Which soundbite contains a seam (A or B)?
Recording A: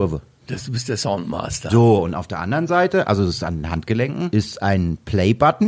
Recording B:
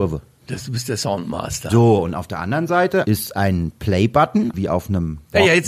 B